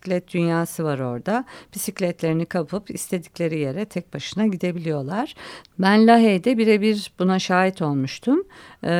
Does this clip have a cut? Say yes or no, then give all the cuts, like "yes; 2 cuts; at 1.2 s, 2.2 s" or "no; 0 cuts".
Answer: yes; 1 cut; at 5.6 s